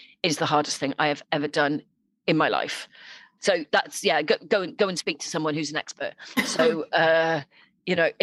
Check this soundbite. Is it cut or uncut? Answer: cut